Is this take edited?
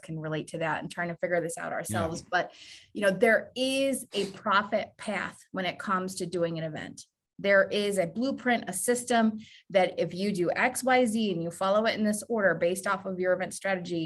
no; 0 cuts

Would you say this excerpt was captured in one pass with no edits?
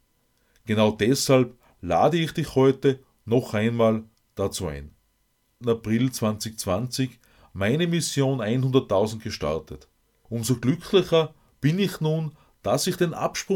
no; 2 cuts; at 5.6 s, 10.3 s

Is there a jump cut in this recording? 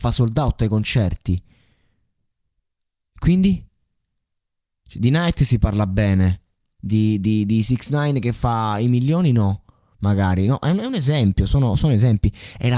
no; 0 cuts

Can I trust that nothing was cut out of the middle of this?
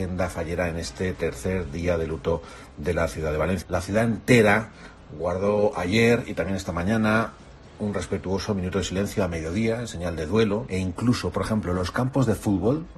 no; 2 cuts; at 3.6 s, 10.7 s

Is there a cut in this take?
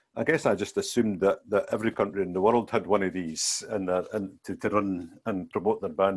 no; 0 cuts

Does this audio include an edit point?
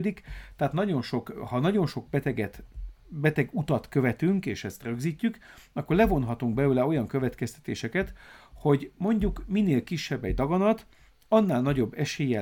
no; 0 cuts

